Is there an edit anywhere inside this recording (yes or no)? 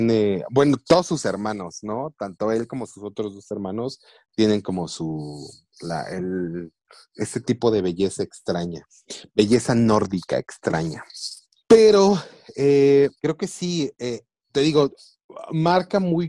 yes